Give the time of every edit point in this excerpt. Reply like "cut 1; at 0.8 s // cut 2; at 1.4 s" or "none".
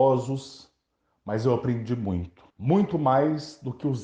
cut 1; at 2.5 s